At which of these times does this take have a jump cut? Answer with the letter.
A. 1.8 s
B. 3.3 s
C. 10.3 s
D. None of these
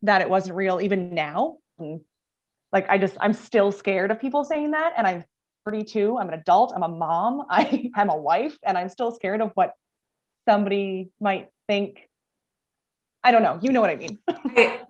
A